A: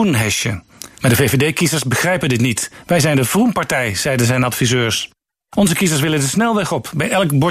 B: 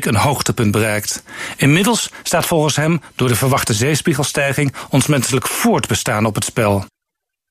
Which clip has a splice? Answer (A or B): A